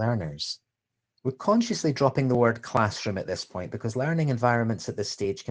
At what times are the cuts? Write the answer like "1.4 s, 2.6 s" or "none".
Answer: 1.2 s